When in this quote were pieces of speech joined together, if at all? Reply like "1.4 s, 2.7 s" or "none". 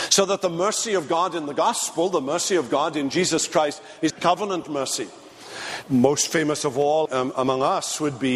4.1 s, 5.8 s, 7.1 s